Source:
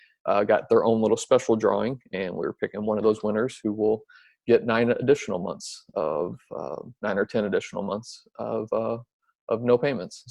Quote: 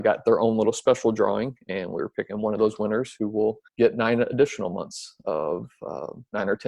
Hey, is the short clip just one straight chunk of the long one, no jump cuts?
no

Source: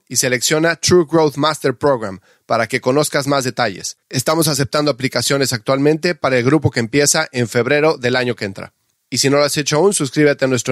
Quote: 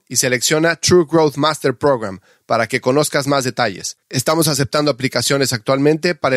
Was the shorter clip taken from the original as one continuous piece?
yes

